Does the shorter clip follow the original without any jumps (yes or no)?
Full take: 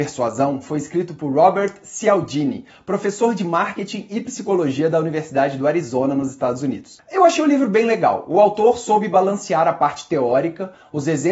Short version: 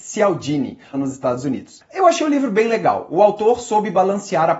no